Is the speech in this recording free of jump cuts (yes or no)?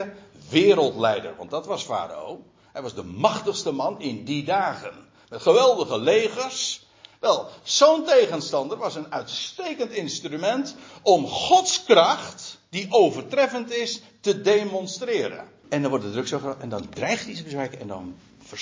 no